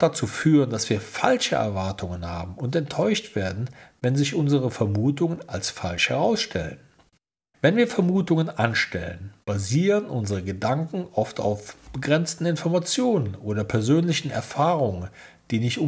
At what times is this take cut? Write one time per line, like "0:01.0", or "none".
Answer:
0:07.5
0:09.4